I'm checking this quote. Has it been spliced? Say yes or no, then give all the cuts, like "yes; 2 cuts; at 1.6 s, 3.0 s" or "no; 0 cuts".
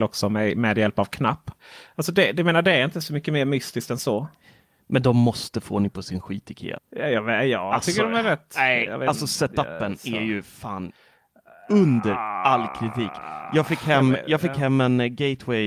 yes; 1 cut; at 6.8 s